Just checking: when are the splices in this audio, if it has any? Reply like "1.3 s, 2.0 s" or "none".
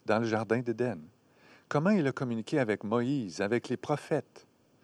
none